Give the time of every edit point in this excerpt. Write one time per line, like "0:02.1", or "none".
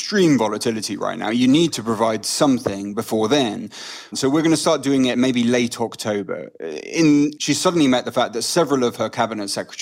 0:04.1
0:07.4